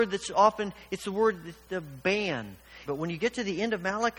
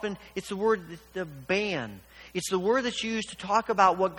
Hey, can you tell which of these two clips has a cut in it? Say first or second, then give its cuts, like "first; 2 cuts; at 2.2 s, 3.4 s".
first; 1 cut; at 2.9 s